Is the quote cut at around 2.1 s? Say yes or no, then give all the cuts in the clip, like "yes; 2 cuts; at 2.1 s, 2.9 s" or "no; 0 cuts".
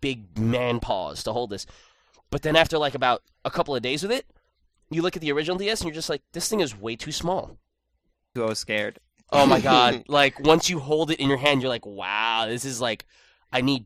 no; 1 cut; at 8.4 s